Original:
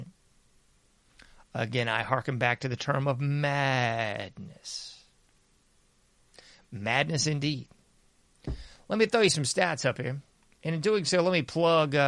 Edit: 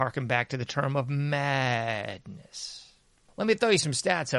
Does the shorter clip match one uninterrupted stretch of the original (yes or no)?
no